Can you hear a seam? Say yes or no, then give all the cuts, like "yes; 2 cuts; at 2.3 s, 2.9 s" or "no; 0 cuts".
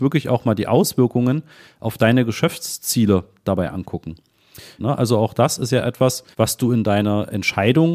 yes; 2 cuts; at 4.8 s, 6.3 s